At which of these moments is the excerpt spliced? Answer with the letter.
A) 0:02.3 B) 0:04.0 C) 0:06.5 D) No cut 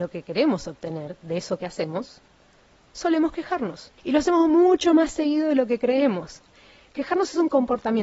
B